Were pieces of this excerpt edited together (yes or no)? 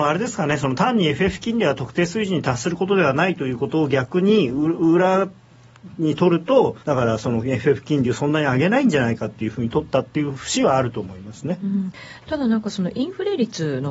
yes